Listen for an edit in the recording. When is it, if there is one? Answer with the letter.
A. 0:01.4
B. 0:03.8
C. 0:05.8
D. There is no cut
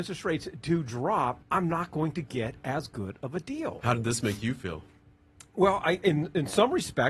A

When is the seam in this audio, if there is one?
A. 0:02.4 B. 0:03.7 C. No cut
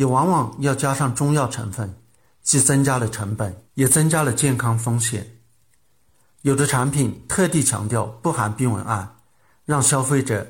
B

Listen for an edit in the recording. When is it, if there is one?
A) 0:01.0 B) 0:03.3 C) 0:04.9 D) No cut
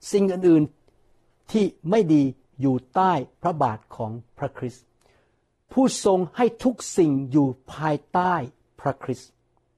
B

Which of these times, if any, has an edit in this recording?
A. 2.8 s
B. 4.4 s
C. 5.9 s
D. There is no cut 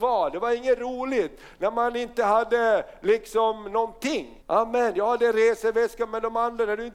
B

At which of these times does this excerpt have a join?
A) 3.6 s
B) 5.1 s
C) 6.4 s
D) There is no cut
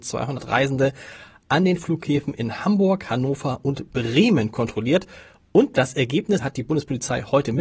C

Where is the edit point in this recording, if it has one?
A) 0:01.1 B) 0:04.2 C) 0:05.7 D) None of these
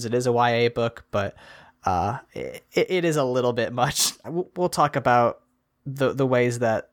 B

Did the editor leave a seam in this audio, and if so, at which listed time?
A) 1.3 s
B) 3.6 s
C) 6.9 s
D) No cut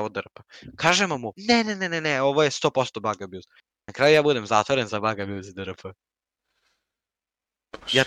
A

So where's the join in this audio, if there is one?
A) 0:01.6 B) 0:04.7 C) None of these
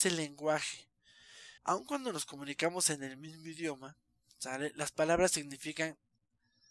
A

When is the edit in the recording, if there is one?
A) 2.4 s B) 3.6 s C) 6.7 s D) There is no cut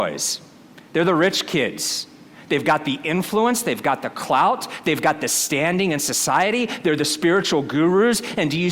D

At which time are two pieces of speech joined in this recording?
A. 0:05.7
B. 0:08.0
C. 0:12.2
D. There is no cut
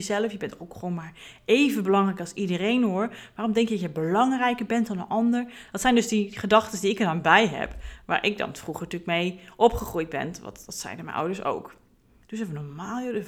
C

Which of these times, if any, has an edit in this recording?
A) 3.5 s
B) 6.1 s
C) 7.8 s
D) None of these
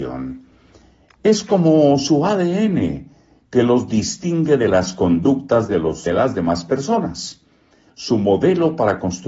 B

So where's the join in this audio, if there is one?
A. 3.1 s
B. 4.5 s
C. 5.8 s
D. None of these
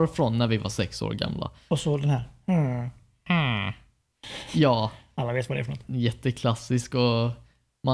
C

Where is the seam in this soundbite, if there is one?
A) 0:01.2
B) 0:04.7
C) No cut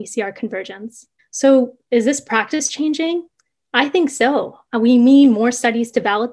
A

